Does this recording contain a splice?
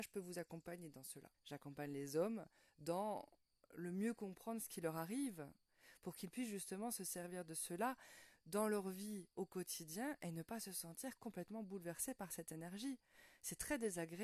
yes; 1 cut; at 1.3 s

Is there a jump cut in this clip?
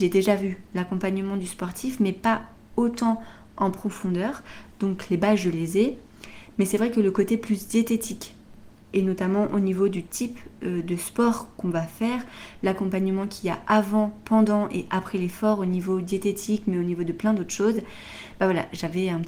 no; 0 cuts

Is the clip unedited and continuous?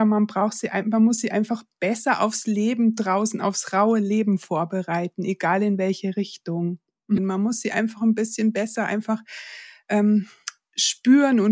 no; 1 cut; at 7.2 s

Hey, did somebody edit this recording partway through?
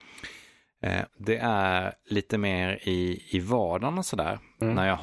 yes; 1 cut; at 1.1 s

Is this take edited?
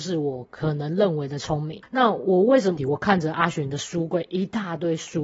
yes; 1 cut; at 2.8 s

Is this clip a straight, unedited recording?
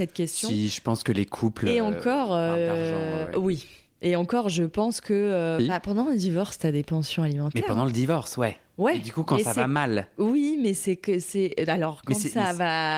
no; 1 cut; at 5.6 s

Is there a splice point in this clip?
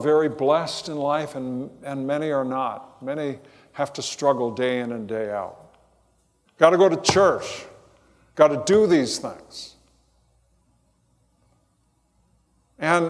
yes; 1 cut; at 6.5 s

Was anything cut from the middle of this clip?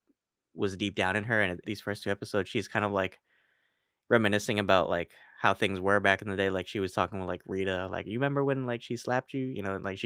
yes; 1 cut; at 1.6 s

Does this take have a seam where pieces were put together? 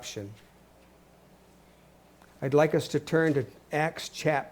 no; 0 cuts

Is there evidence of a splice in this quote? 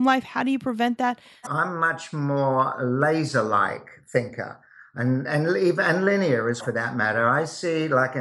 yes; 2 cuts; at 1.5 s, 6.6 s

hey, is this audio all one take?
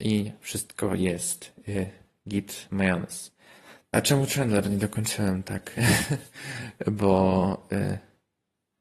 no; 1 cut; at 3.9 s

